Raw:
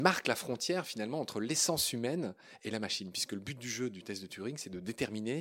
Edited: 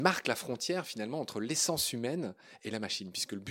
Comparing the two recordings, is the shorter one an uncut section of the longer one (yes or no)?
yes